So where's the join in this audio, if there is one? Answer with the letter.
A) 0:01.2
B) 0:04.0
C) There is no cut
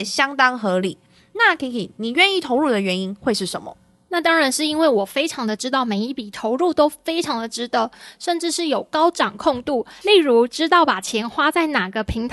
C